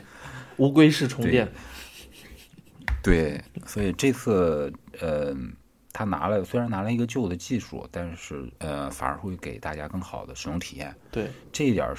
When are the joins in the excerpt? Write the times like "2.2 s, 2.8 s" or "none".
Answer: 8.6 s